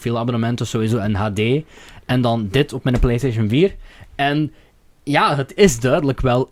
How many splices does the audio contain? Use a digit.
0